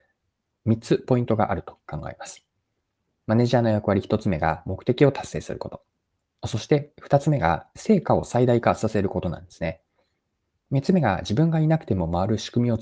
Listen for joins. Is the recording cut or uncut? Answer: uncut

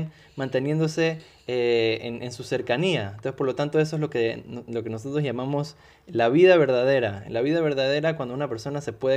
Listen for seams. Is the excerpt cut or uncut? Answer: uncut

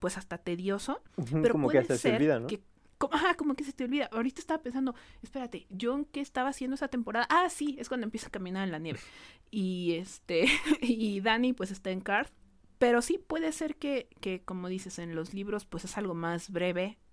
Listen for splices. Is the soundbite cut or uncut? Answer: uncut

